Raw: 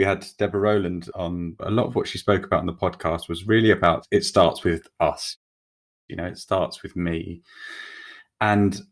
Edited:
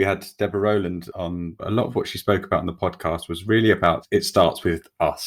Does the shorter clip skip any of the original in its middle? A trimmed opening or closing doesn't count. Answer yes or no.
no